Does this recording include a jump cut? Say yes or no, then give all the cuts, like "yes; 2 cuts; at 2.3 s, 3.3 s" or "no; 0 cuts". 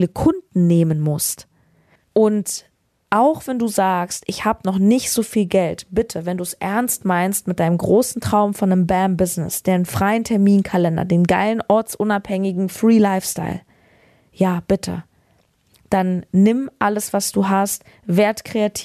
yes; 1 cut; at 2.0 s